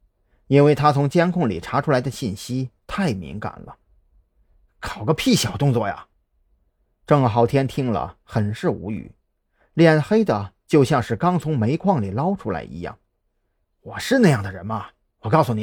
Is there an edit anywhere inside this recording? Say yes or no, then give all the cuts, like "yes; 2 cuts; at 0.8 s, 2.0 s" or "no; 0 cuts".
no; 0 cuts